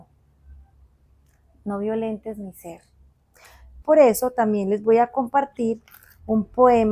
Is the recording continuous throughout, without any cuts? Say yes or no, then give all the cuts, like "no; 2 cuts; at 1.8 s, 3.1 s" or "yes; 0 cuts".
no; 1 cut; at 3.8 s